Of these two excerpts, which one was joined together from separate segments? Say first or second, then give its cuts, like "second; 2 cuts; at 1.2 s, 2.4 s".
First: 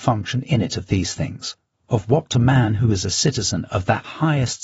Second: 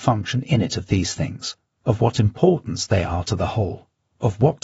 first; 1 cut; at 1.7 s